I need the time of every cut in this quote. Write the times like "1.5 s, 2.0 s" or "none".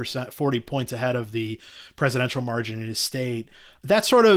none